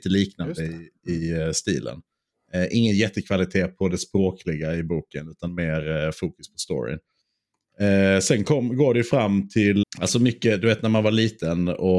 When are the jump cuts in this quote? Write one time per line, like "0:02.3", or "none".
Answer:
0:09.8